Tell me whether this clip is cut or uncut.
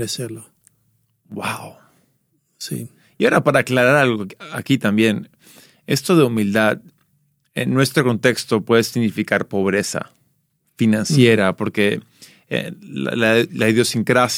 uncut